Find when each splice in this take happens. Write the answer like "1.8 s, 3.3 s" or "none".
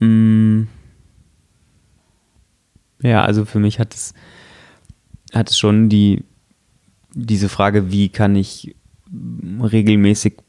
none